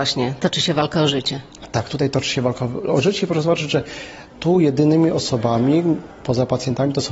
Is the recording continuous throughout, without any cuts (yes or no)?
no